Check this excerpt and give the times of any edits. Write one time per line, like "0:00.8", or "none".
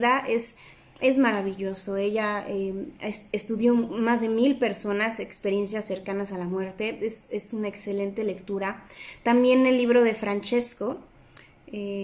none